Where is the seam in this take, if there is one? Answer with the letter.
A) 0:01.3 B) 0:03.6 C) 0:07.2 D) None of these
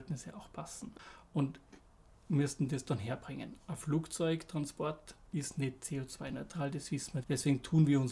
C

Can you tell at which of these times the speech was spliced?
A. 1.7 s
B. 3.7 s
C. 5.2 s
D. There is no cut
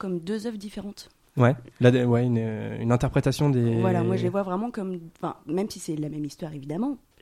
A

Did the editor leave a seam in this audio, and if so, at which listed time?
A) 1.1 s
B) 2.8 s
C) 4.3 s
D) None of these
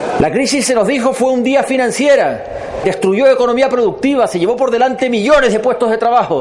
B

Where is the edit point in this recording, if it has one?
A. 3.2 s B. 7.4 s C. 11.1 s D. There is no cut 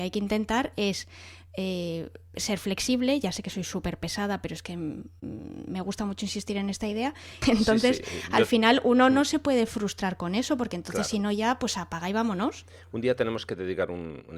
B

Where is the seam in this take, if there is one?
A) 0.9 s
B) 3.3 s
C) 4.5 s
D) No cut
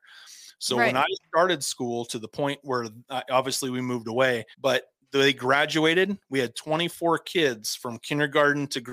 C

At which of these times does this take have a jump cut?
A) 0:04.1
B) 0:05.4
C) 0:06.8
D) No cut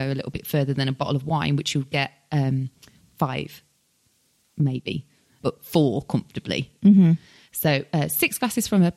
B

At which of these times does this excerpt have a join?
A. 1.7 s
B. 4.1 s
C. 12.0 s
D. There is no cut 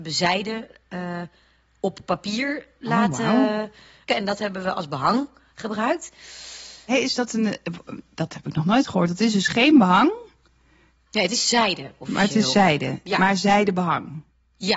B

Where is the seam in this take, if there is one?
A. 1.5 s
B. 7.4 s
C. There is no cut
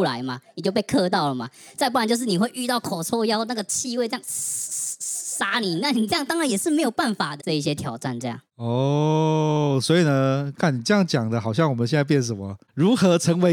B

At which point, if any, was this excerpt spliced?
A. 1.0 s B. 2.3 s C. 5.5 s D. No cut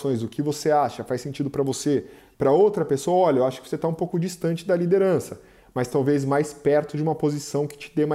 B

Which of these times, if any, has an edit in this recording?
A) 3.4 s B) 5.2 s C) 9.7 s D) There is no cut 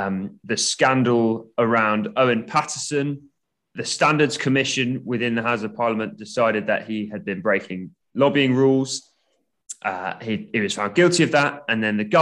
D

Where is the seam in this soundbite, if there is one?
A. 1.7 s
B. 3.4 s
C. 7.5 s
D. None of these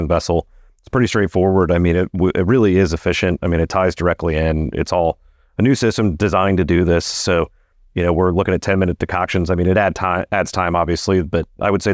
D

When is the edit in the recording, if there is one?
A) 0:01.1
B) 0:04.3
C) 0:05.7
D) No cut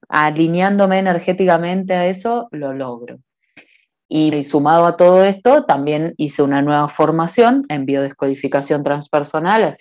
B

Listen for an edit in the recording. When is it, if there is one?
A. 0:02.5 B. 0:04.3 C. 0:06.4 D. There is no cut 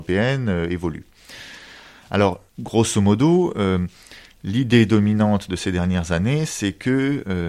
A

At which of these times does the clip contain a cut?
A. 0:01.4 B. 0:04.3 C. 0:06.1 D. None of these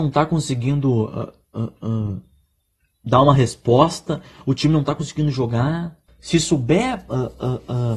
C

